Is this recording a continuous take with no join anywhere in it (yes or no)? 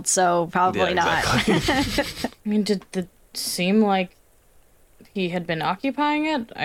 yes